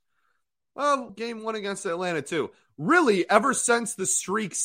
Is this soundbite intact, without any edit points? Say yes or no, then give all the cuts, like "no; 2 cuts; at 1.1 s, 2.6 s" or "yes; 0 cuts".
no; 1 cut; at 1.1 s